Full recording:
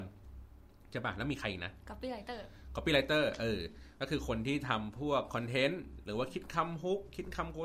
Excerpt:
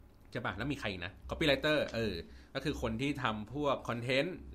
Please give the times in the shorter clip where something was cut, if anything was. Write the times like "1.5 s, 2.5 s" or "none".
1.2 s

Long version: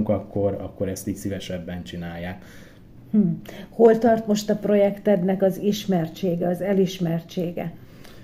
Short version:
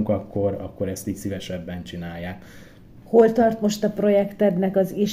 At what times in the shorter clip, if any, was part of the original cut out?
3.0 s

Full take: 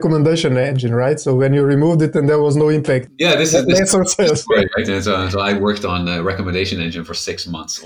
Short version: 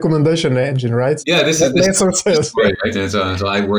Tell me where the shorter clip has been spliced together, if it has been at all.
1.2 s

